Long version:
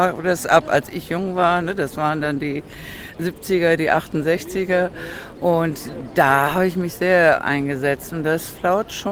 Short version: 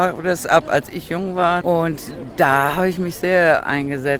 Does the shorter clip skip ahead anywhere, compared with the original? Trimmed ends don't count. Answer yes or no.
yes